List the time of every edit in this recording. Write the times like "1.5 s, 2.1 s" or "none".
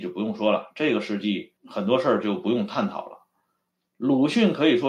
1.6 s